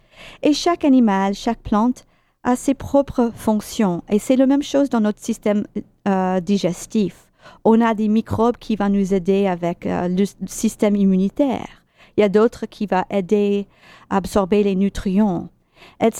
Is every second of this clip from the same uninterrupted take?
yes; 0 cuts

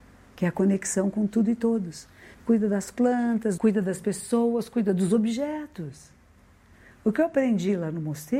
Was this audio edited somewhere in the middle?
yes; 2 cuts; at 2.3 s, 3.6 s

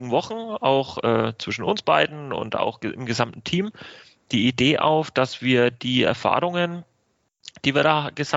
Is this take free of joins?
yes; 0 cuts

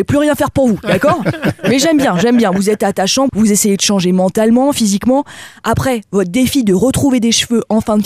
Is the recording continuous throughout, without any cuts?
no; 1 cut; at 3.3 s

